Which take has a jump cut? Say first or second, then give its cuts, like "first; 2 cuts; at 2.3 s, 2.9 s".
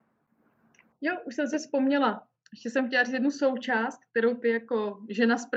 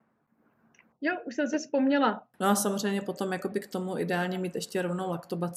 second; 1 cut; at 2.3 s